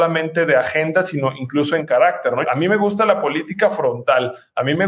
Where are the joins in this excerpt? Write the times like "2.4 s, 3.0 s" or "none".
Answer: 2.4 s